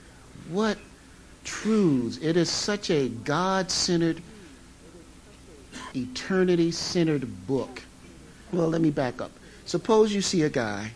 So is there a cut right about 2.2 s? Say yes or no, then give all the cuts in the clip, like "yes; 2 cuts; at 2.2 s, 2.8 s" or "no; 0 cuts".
no; 2 cuts; at 5.9 s, 8.5 s